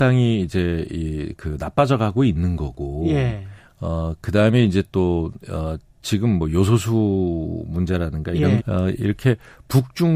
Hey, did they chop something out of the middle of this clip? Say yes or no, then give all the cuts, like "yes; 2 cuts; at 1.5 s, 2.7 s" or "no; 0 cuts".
yes; 1 cut; at 8.6 s